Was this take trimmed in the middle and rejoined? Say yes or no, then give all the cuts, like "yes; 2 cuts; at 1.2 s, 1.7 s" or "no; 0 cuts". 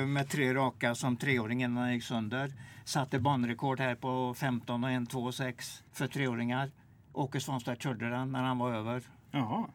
yes; 1 cut; at 5.9 s